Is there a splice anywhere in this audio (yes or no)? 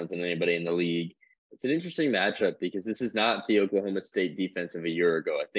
yes